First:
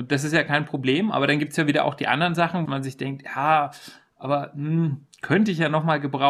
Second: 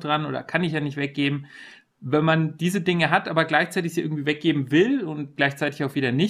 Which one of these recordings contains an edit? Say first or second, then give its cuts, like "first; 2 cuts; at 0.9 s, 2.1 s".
first; 1 cut; at 2.7 s